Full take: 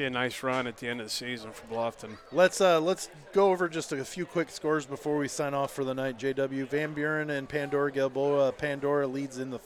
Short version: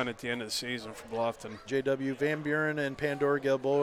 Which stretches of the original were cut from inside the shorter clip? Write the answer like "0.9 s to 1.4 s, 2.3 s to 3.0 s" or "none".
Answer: 2.2 s to 6.2 s

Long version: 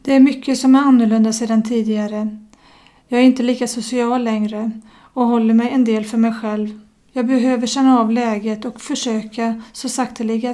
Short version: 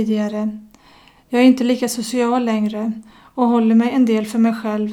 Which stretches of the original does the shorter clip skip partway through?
none

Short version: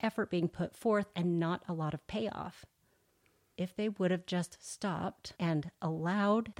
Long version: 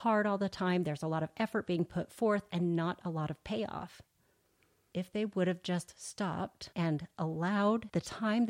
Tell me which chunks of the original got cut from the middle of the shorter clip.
none

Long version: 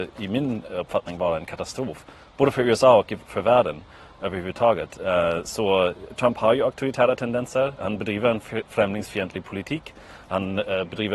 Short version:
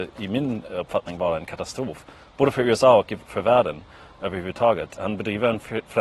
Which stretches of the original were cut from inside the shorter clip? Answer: 4.9 s to 7.8 s

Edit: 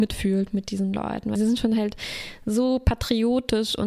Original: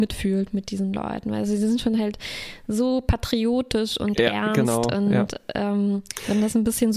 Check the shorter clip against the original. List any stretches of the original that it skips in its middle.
1.4 s to 1.6 s

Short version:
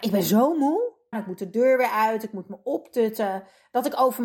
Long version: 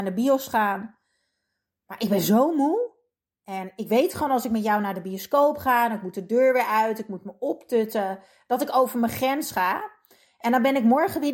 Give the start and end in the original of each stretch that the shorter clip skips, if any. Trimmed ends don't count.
3.1 s to 5.9 s

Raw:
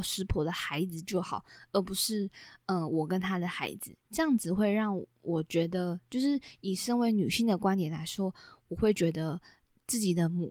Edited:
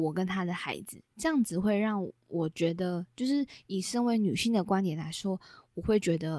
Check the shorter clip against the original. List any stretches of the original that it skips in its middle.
none

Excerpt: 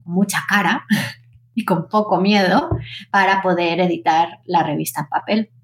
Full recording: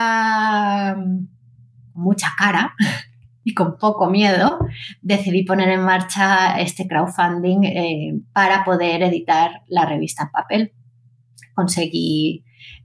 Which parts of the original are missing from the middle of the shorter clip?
5.0 s to 8.3 s

